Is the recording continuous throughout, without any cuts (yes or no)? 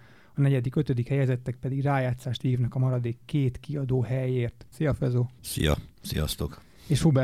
no